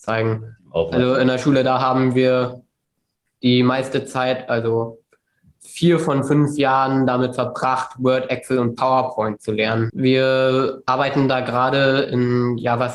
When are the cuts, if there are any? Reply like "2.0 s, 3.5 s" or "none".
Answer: 9.9 s